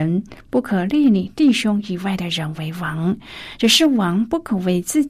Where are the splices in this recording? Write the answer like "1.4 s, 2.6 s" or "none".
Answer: none